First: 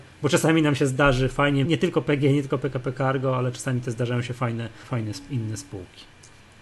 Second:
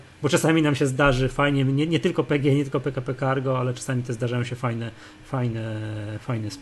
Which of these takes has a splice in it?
first; 2 cuts; at 1.6 s, 4.8 s

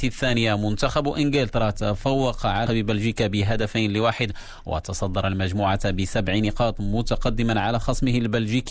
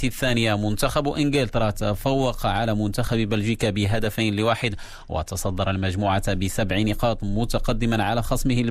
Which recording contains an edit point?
first; 1 cut; at 2.7 s

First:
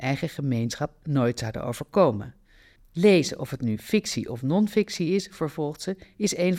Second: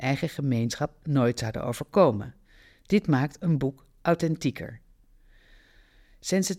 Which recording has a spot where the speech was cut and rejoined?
first; 1 cut; at 2.8 s

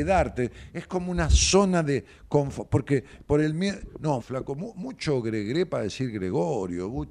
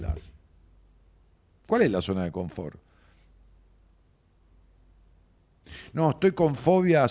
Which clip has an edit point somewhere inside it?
first; 1 cut; at 4.2 s

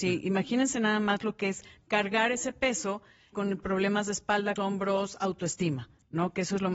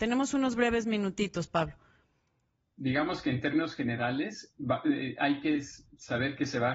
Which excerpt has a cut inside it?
first; 2 cuts; at 3.3 s, 4.6 s

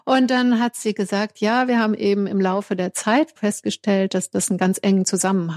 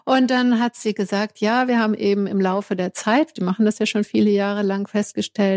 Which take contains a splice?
first; 1 cut; at 3.4 s

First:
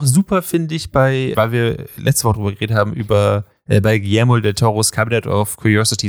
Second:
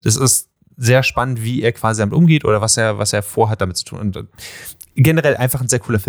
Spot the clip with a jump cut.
first; 1 cut; at 1.3 s

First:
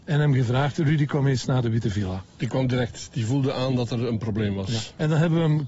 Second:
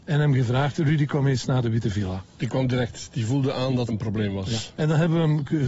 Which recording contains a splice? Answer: second; 1 cut; at 3.9 s

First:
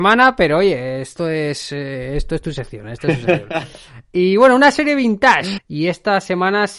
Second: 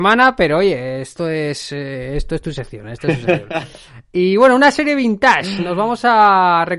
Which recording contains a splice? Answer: first; 1 cut; at 5.6 s

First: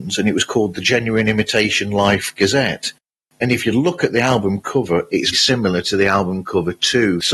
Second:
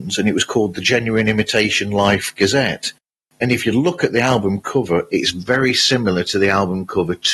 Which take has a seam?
first; 1 cut; at 5.3 s

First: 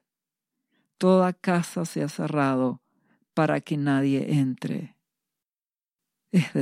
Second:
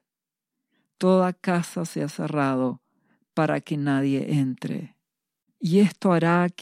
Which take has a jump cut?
second; 1 cut; at 5.5 s

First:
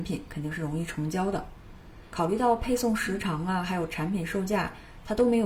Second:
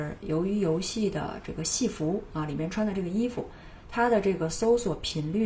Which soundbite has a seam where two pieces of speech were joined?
first; 1 cut; at 2.1 s

